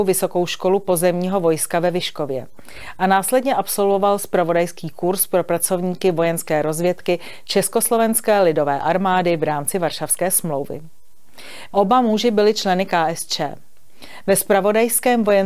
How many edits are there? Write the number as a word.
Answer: two